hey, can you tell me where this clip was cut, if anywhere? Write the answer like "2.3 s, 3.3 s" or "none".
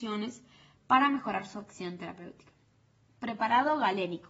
none